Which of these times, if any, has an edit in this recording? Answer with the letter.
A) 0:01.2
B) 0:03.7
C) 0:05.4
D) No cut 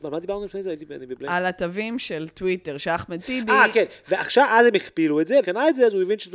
C